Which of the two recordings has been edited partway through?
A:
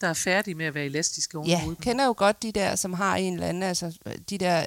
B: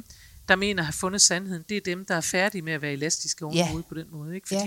A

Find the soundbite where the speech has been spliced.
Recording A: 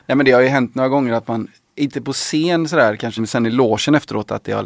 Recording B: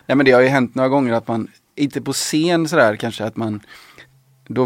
A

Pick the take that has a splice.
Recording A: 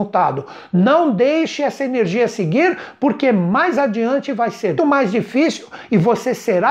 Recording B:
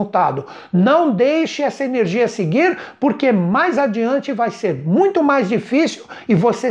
A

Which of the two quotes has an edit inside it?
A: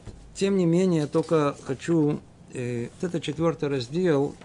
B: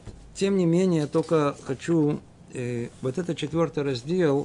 A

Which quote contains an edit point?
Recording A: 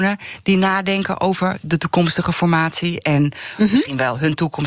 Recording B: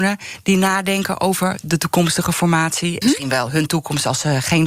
B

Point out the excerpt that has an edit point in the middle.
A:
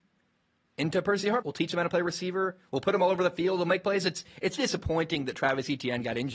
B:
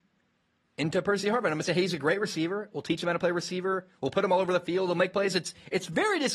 A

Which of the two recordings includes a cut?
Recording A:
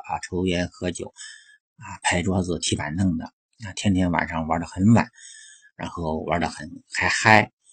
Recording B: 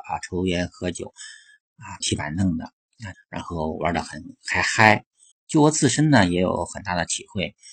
B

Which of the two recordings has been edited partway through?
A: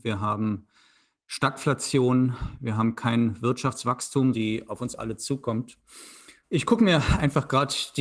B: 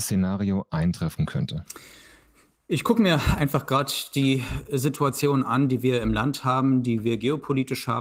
A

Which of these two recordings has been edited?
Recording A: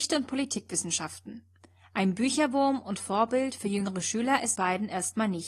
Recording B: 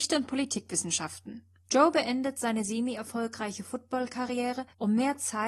B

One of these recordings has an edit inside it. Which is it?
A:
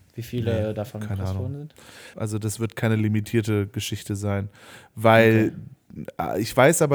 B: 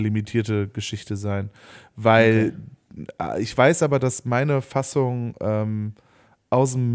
A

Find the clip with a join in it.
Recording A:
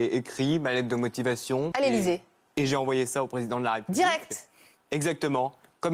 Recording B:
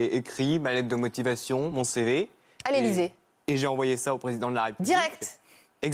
A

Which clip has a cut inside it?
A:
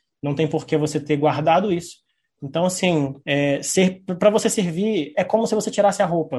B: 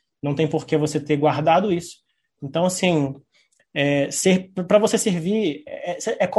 A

